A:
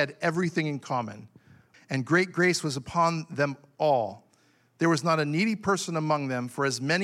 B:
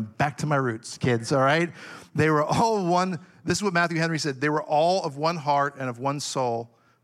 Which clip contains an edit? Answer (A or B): A